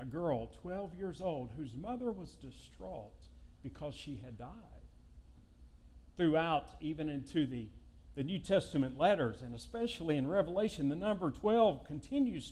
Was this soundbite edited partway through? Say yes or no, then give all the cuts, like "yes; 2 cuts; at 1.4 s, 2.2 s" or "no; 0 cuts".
no; 0 cuts